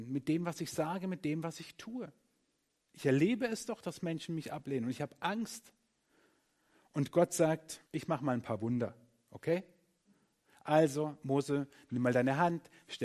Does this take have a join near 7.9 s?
yes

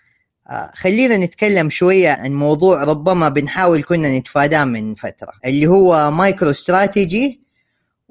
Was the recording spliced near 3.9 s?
no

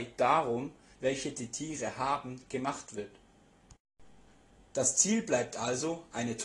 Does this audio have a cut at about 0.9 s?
yes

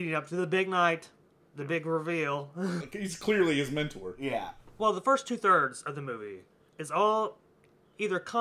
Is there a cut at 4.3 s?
no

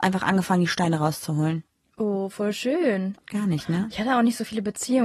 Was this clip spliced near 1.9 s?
no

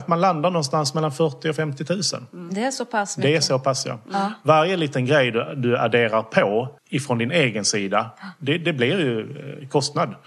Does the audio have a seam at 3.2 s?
no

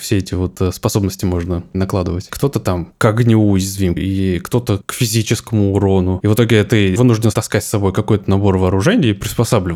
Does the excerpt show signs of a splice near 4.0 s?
yes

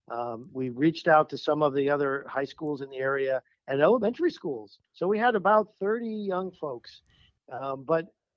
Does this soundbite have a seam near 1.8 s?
no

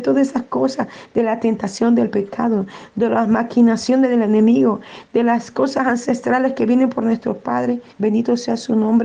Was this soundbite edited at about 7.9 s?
yes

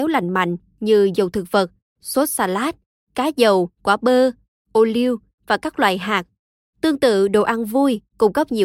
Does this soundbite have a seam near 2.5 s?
no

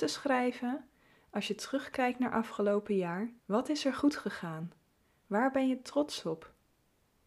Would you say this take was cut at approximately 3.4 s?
yes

